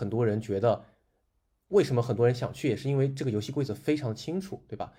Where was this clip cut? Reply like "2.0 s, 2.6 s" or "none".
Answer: none